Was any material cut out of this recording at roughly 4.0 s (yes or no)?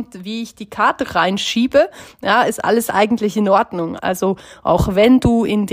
yes